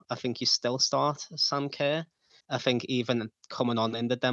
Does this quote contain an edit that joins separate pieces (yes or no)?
yes